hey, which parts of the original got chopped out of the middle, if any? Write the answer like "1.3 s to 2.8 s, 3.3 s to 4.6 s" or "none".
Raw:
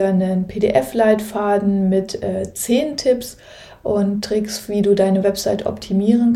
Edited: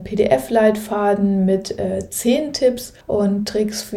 3.4 s to 3.8 s

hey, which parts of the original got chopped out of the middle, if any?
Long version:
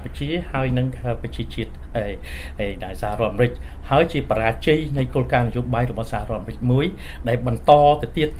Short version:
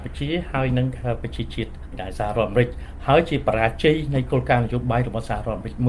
1.9 s to 2.7 s

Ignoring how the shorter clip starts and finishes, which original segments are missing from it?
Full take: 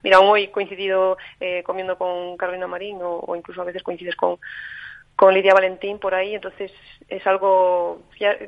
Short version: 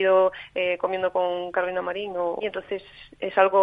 3.3 s to 6.3 s

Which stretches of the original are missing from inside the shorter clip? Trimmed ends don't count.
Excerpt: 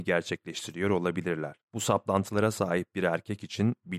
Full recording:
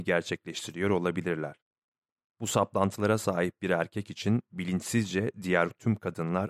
1.6 s to 2.3 s

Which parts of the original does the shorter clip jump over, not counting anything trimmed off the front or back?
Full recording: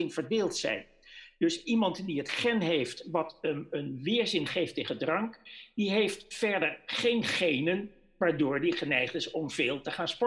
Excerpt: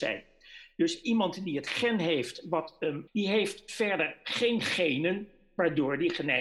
3.7 s to 5.7 s

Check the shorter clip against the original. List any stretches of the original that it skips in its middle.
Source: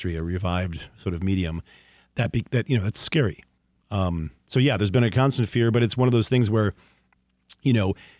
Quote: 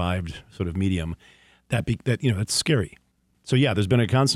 3.8 s to 4.4 s

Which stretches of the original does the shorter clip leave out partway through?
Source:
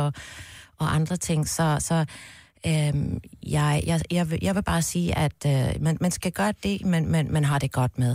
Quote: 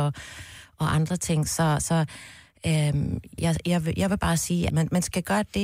3.4 s to 3.8 s, 5.2 s to 5.8 s

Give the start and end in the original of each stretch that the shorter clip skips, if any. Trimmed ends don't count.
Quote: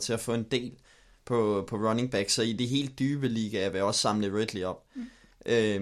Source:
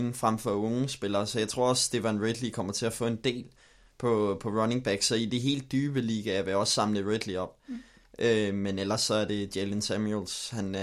none

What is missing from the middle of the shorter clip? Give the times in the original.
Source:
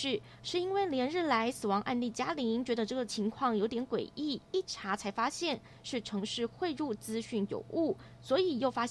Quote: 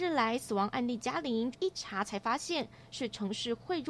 2.6 s to 4.4 s

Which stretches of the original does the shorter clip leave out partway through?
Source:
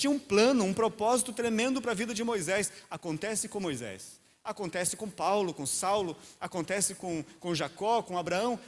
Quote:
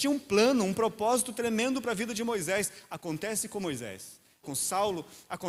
4.4 s to 5.5 s

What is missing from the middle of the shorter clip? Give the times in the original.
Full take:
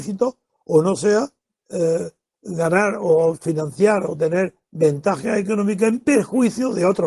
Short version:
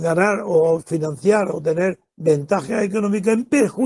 none

